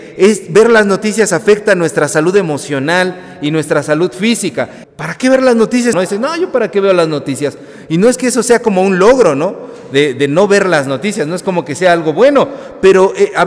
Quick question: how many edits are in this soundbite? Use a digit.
2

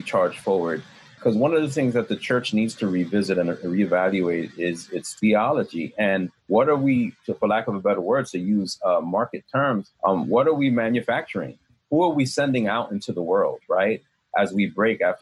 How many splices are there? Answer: 2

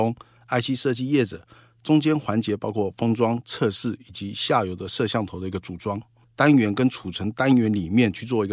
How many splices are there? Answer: 1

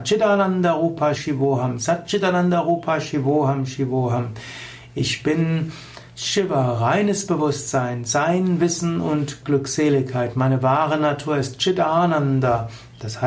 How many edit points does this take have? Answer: 1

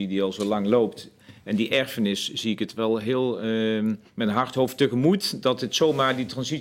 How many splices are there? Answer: 1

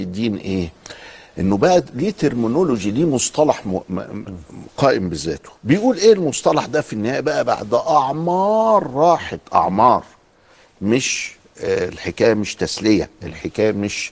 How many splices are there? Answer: 0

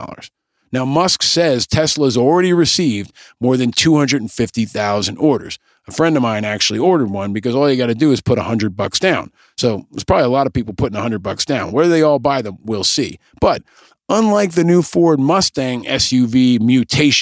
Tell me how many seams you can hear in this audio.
0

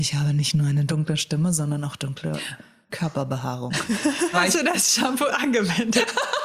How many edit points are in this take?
1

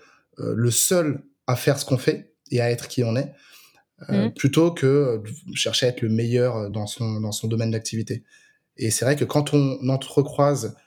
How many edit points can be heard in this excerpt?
1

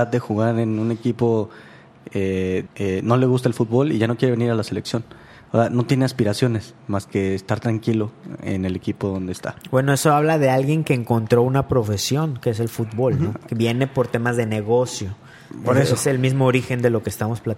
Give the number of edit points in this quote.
1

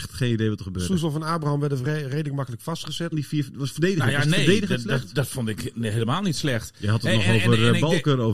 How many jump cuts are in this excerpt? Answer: 1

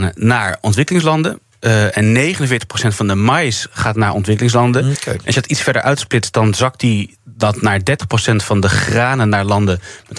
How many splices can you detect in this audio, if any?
0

